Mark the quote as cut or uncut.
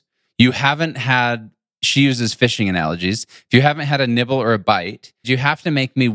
cut